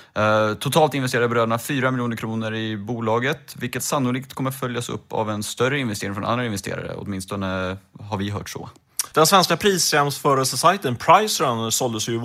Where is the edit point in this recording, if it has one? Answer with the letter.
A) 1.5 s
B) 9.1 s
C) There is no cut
B